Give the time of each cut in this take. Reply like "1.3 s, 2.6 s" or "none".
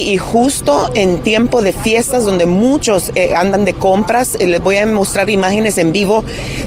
none